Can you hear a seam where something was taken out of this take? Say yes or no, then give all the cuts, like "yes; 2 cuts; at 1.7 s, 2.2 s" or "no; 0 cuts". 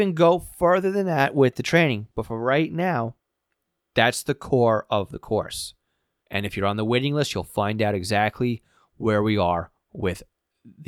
yes; 1 cut; at 6.2 s